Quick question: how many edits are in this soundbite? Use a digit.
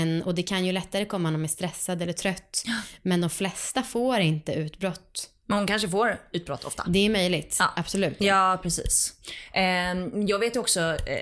1